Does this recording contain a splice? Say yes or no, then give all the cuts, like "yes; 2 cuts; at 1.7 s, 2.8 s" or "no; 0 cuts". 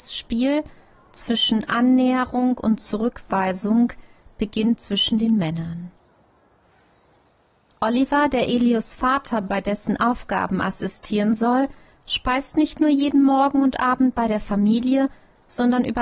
no; 0 cuts